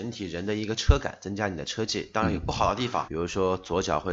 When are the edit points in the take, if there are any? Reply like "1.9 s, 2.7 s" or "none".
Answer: 3.1 s